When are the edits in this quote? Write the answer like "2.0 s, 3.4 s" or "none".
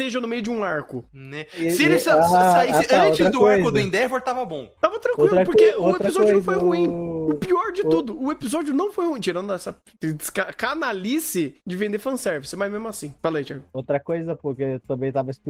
none